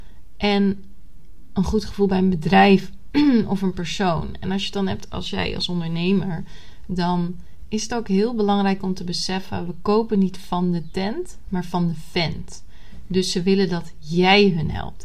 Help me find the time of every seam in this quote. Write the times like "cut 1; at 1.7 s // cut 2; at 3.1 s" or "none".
none